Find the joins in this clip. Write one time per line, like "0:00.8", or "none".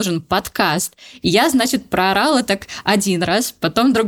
none